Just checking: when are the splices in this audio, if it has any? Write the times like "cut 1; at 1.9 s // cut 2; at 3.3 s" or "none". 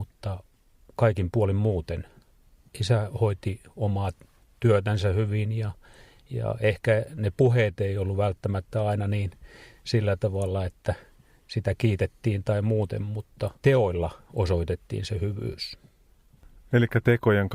cut 1; at 13.5 s